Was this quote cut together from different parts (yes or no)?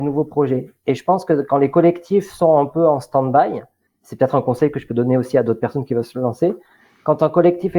no